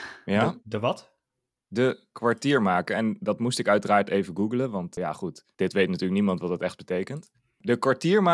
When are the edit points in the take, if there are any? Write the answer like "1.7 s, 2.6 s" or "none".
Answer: none